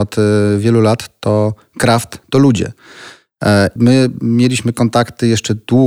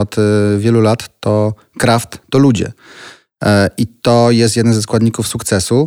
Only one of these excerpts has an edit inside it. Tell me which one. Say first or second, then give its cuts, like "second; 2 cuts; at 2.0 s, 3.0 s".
first; 1 cut; at 3.8 s